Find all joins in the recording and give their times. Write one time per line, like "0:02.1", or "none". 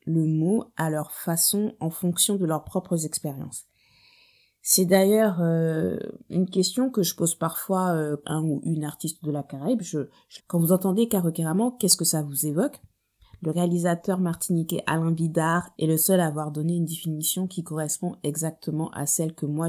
0:08.2
0:10.4